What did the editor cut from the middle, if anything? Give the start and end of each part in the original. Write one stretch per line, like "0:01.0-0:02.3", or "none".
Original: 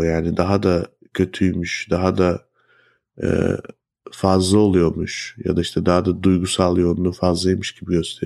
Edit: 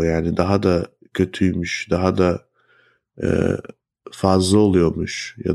none